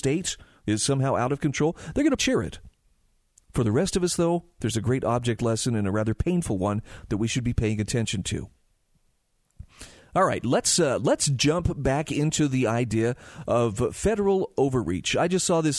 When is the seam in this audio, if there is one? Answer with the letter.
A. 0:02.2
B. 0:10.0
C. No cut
A